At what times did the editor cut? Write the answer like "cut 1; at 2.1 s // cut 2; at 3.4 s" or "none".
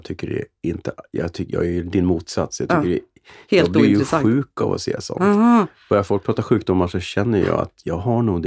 none